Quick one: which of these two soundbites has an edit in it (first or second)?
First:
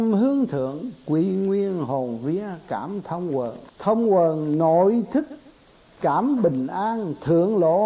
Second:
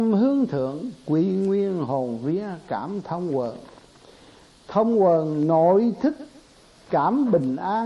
first